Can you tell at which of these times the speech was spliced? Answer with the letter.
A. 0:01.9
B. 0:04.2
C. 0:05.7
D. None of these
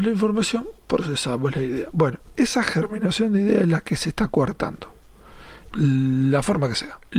C